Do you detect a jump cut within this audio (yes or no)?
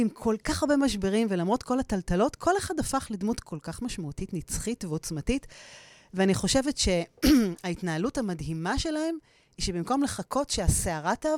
no